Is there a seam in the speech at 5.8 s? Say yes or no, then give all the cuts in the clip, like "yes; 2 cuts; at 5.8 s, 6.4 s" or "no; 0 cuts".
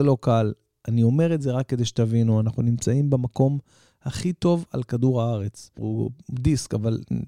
yes; 1 cut; at 5.8 s